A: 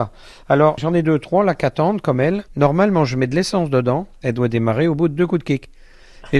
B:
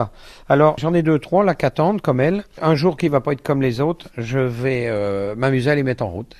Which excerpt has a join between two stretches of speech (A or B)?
A